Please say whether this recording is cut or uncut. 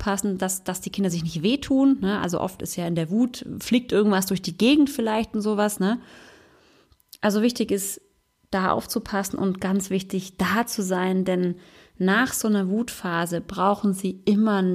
uncut